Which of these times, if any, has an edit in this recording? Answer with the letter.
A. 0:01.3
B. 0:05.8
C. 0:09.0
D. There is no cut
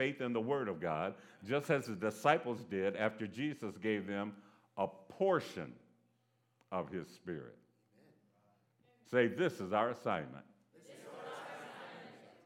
C